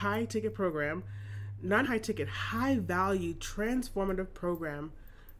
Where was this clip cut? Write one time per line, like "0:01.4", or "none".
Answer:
0:01.8